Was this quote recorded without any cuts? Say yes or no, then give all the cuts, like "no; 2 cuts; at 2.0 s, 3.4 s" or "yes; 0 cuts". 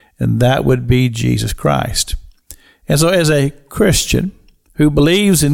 yes; 0 cuts